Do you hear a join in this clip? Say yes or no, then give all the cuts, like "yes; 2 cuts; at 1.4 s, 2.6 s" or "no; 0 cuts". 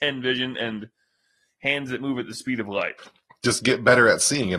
yes; 1 cut; at 3.0 s